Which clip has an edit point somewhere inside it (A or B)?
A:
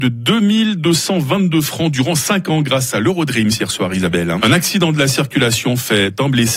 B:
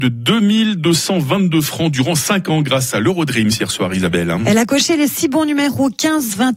A